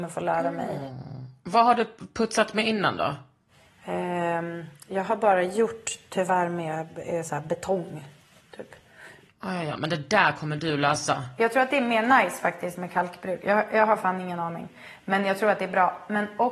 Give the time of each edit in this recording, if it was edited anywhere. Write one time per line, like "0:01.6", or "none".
none